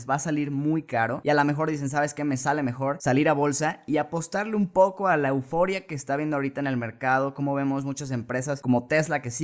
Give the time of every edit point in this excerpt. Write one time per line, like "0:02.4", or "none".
none